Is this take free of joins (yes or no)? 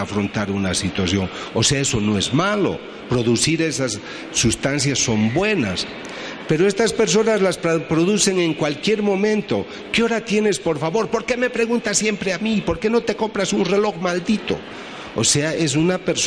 yes